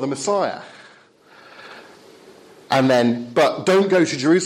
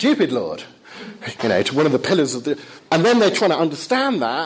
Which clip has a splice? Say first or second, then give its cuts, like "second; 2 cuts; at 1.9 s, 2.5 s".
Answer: second; 2 cuts; at 1.4 s, 2.8 s